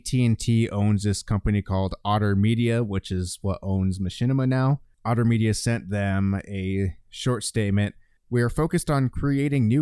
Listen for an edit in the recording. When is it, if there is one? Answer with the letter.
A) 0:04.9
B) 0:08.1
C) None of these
A